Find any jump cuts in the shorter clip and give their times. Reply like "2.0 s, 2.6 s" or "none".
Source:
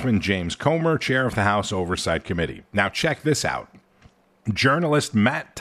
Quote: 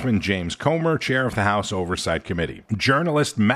2.7 s